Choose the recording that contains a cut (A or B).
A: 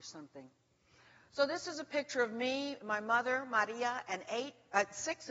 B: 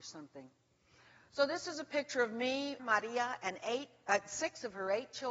B